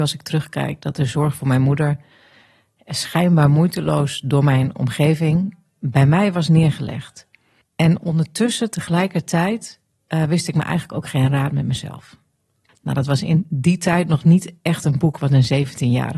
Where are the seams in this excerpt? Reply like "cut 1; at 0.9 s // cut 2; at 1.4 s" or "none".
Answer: cut 1; at 7.6 s // cut 2; at 12.7 s